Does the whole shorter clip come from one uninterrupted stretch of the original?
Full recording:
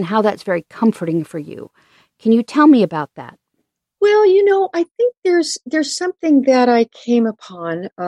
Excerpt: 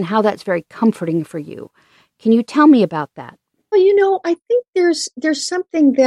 no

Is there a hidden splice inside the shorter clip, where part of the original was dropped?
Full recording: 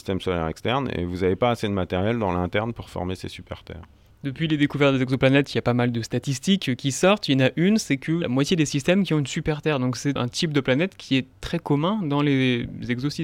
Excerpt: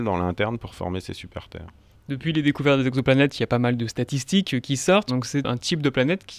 yes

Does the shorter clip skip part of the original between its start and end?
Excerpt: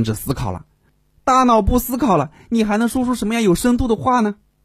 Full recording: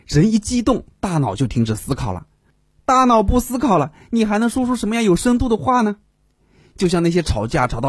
no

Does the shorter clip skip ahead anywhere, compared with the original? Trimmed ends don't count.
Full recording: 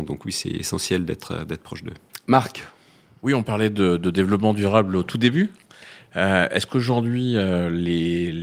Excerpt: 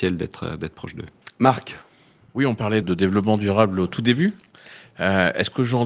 yes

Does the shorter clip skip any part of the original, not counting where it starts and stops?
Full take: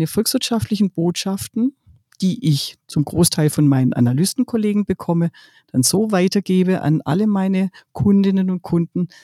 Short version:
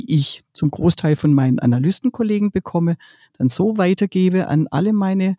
no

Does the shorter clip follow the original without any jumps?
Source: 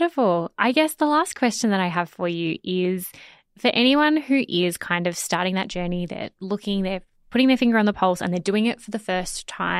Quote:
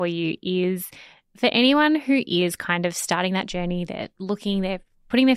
yes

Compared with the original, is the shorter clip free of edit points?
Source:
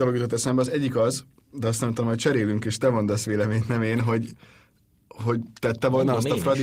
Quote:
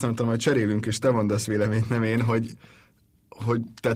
yes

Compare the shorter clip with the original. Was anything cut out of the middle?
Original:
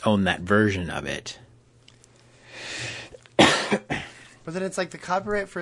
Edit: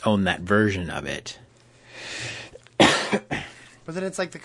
yes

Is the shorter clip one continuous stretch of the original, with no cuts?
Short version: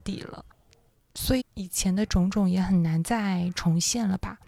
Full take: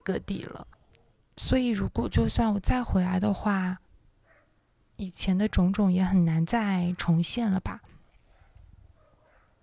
no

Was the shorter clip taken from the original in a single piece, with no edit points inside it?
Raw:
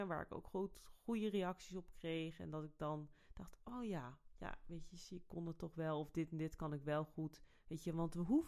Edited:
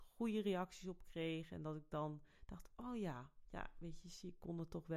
yes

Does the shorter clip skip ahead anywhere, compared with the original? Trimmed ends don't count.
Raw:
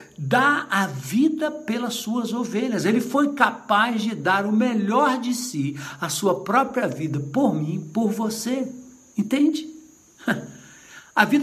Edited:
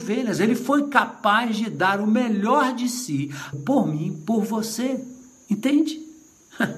yes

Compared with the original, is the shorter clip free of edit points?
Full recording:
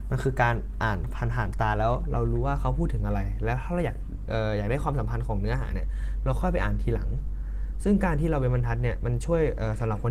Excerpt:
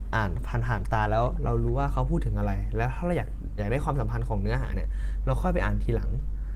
no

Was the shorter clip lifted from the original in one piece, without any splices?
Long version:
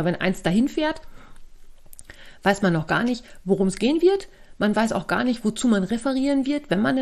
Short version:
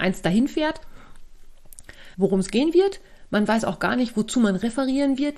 no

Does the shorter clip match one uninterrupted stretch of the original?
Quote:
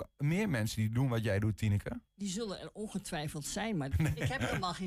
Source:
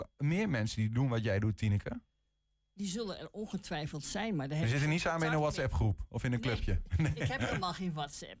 no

